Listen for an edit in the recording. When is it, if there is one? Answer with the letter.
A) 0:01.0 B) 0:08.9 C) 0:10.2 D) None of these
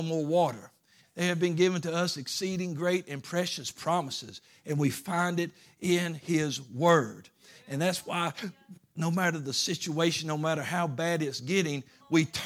A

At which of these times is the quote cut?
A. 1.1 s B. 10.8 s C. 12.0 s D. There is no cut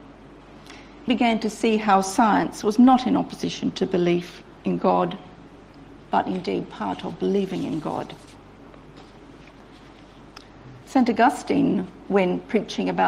A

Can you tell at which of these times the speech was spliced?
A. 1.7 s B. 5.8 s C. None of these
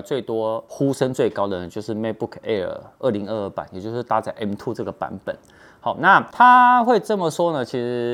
C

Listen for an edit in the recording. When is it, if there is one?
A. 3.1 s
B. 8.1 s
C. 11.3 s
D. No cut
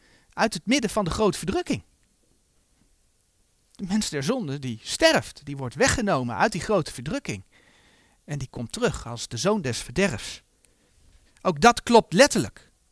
C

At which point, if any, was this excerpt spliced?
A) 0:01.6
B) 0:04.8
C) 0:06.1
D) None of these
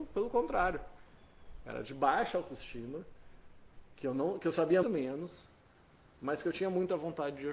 B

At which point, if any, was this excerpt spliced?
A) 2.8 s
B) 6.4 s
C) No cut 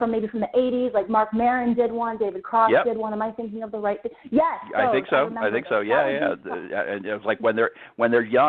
C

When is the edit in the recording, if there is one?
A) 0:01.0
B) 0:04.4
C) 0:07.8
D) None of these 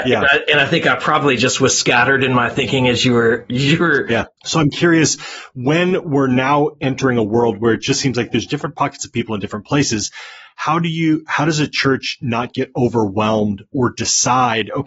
B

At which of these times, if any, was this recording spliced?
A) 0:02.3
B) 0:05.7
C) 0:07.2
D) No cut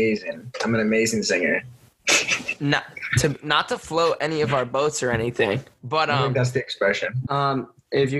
C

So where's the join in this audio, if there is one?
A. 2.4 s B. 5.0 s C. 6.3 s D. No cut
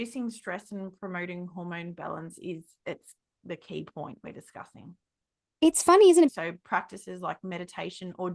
C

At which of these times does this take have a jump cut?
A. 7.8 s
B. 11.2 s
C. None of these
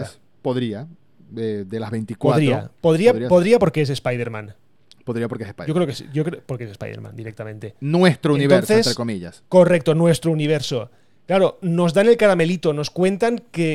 A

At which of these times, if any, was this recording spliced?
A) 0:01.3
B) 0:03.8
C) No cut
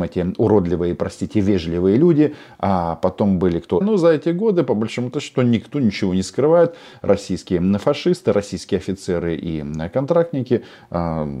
B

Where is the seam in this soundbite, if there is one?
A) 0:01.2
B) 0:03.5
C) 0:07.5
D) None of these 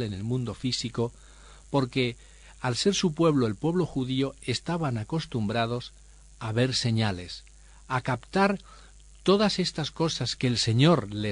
D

